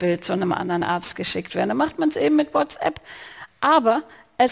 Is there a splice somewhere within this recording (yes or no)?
no